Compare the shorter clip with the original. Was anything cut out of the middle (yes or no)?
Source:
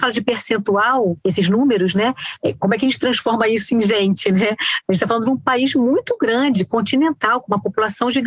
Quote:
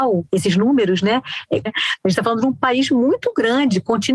yes